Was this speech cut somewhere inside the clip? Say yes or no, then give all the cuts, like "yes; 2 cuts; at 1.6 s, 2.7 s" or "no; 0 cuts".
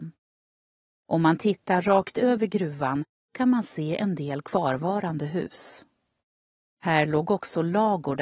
no; 0 cuts